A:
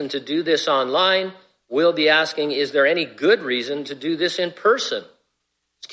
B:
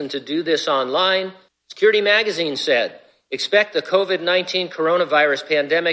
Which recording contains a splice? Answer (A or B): B